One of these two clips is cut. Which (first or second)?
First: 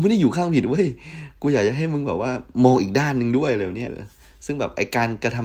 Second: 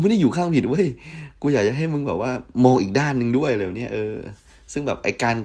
first